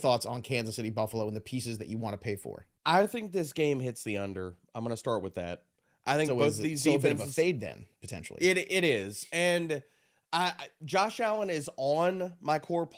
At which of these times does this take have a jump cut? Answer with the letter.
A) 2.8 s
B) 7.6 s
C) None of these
C